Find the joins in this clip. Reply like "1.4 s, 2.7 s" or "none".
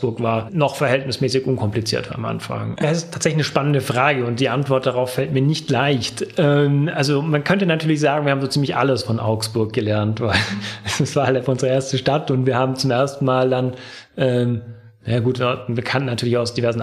2.8 s